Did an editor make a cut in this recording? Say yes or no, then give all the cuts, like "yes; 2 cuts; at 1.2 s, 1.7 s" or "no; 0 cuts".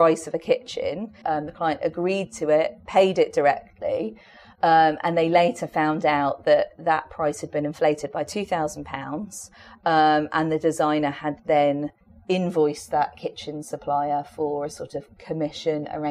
yes; 1 cut; at 1.2 s